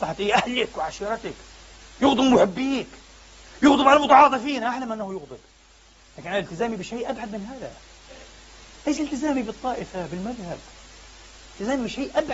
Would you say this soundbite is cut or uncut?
uncut